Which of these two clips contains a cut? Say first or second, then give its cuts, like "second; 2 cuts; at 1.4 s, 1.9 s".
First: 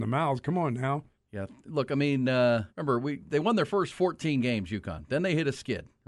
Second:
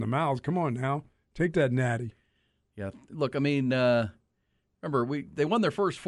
first; 2 cuts; at 1.1 s, 2.7 s